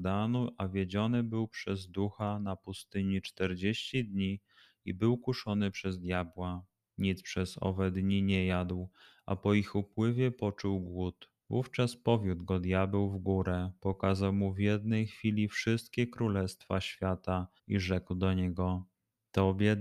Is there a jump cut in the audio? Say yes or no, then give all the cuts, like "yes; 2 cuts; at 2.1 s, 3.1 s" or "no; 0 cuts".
yes; 2 cuts; at 11.4 s, 17.6 s